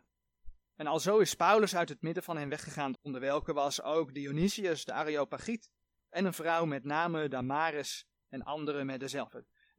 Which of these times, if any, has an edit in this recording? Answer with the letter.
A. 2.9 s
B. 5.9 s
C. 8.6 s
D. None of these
A